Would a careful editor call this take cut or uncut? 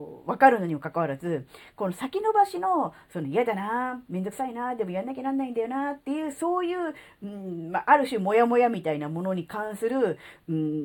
uncut